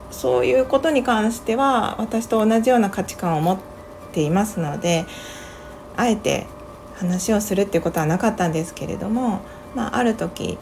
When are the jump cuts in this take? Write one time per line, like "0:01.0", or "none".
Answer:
0:05.9